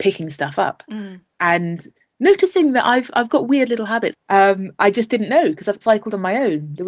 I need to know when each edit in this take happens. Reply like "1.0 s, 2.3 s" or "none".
4.1 s, 5.8 s